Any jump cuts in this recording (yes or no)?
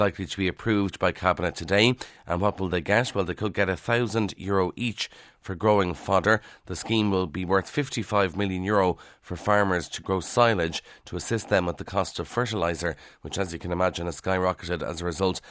no